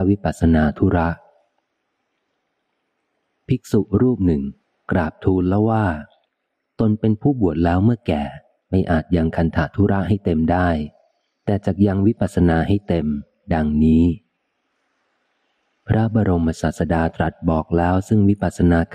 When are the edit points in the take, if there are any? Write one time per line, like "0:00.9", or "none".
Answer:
none